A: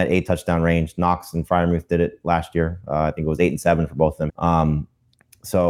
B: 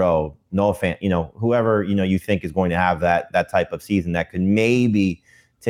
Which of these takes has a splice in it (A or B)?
A